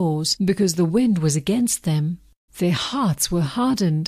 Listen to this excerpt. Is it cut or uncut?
cut